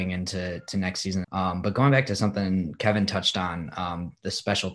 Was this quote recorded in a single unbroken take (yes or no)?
no